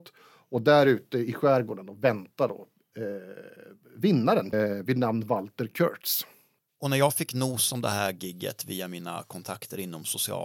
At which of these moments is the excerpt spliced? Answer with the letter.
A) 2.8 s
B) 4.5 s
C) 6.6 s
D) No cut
B